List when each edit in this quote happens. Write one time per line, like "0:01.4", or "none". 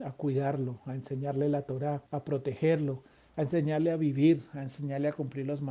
0:02.1